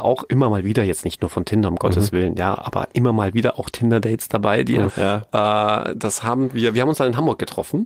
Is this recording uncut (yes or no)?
no